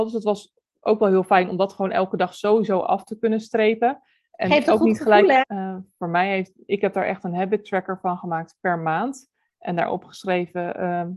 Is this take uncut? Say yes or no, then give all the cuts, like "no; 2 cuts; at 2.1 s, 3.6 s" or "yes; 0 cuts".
no; 1 cut; at 5.4 s